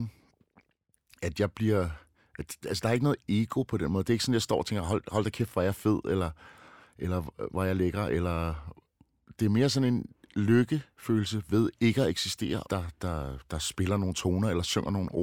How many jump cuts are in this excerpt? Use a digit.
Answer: 2